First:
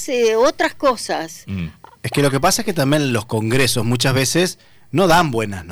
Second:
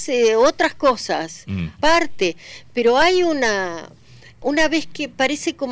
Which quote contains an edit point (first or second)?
second